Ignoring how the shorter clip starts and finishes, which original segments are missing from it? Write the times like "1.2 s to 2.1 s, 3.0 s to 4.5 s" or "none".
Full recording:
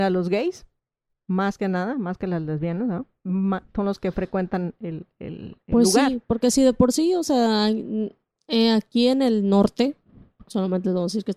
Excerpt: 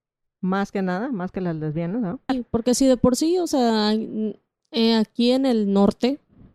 3.2 s to 6.1 s